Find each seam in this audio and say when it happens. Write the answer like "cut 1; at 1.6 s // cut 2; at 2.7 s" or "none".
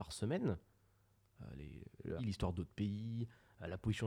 cut 1; at 2.2 s